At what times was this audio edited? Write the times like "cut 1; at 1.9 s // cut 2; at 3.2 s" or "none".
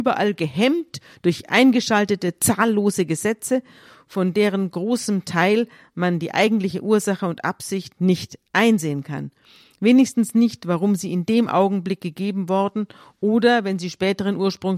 none